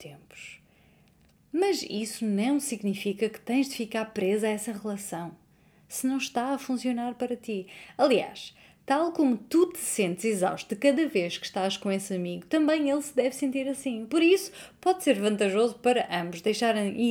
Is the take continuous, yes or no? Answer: yes